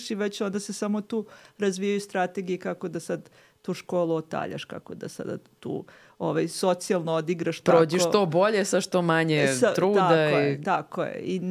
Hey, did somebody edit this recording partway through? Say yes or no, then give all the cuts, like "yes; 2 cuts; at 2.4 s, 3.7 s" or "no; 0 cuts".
no; 0 cuts